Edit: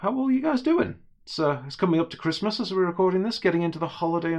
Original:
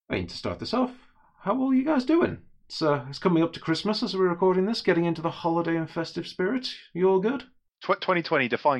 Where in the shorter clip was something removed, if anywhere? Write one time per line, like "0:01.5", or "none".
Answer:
none